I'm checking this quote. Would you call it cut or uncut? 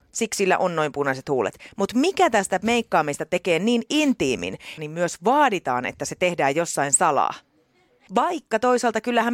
cut